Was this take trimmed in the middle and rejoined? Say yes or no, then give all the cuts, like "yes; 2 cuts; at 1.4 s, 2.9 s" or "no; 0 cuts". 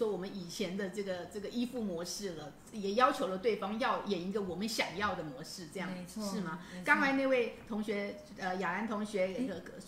no; 0 cuts